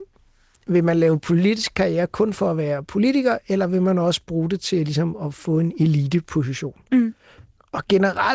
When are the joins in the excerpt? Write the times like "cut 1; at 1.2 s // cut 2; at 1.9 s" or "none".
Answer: none